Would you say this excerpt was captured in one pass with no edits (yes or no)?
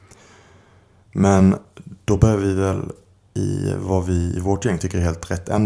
yes